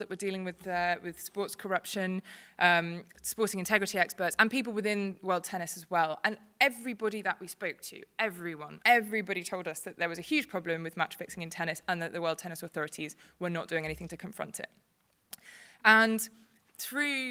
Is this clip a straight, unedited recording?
no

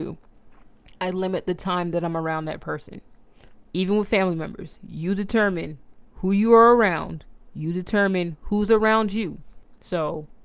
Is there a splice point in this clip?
yes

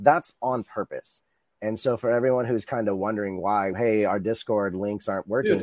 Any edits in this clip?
yes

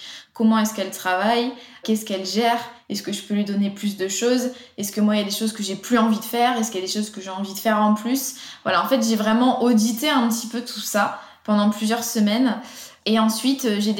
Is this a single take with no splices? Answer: yes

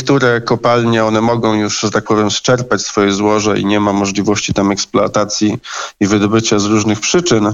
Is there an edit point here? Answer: no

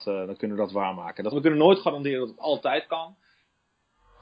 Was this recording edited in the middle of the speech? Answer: yes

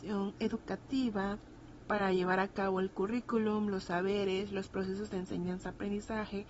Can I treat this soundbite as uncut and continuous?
yes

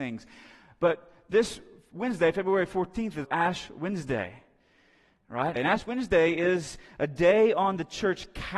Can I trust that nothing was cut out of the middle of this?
no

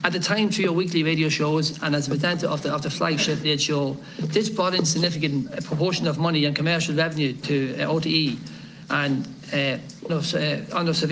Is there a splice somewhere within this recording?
yes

